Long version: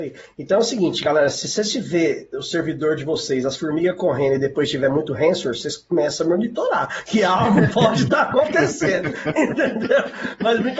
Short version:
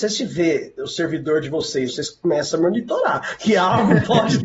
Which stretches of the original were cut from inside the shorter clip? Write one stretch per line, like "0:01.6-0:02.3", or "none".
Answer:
0:03.4-0:05.5